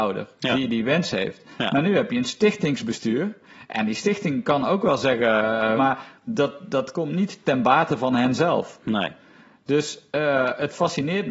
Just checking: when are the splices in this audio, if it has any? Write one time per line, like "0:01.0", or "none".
0:05.8